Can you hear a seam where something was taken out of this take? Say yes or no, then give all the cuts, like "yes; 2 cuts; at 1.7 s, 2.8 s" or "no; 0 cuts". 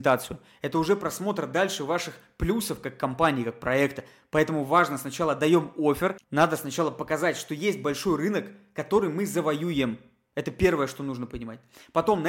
yes; 1 cut; at 6.2 s